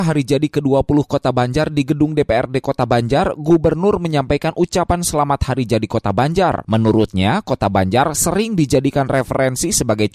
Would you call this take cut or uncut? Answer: uncut